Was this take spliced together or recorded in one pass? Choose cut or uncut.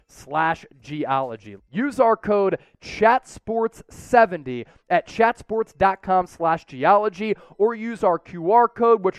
cut